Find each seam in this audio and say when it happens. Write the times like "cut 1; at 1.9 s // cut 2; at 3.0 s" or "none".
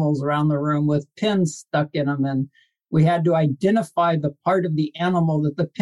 none

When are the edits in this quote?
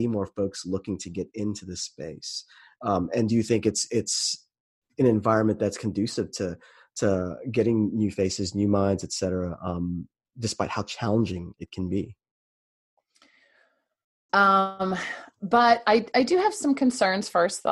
cut 1; at 14.3 s

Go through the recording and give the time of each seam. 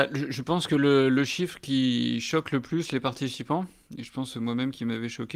none

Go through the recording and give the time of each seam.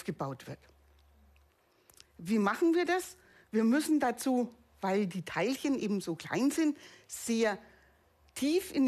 none

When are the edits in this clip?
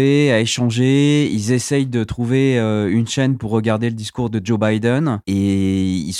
cut 1; at 5.2 s

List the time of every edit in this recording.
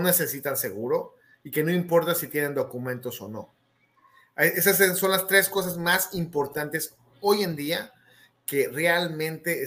none

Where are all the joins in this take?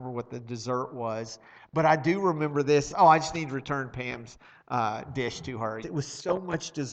cut 1; at 2.9 s // cut 2; at 5.8 s

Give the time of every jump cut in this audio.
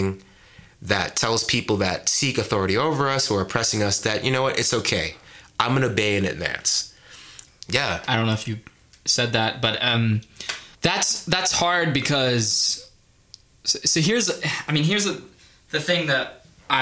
cut 1; at 7.5 s // cut 2; at 10.7 s

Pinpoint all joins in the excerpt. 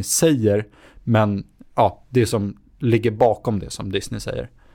none

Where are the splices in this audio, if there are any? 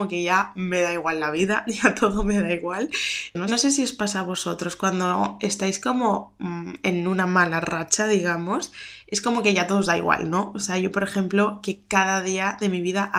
cut 1; at 3.3 s

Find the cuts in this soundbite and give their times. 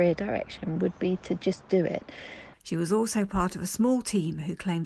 cut 1; at 2.5 s

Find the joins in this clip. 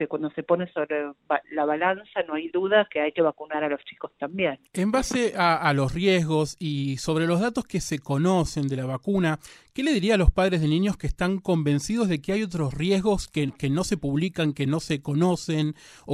cut 1; at 4.7 s

